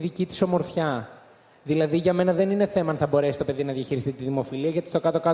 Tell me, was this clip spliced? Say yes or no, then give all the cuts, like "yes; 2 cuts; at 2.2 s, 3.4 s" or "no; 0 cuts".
no; 0 cuts